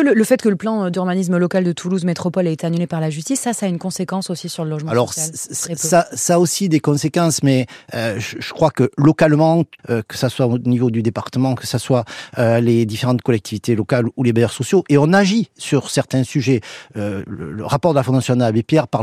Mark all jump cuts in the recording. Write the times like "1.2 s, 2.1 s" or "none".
9.8 s